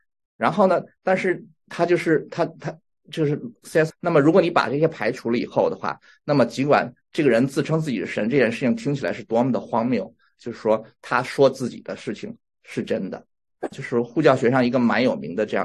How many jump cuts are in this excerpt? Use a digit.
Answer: 3